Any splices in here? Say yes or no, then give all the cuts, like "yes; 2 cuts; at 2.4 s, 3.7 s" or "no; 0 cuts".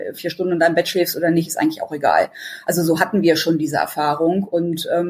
no; 0 cuts